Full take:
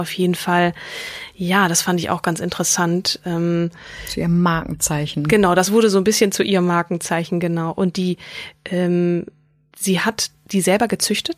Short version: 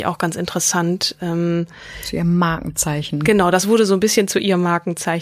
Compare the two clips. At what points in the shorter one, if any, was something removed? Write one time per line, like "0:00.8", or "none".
none